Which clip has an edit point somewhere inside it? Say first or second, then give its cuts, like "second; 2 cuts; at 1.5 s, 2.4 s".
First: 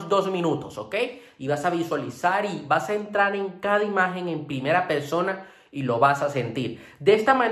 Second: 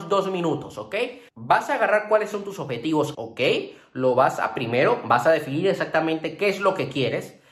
second; 2 cuts; at 1.3 s, 3.1 s